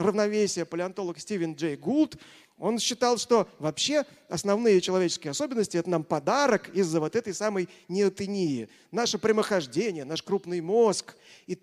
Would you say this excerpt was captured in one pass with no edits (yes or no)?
yes